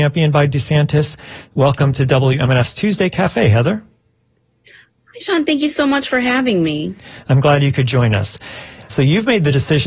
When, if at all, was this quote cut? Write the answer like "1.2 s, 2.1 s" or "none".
8.9 s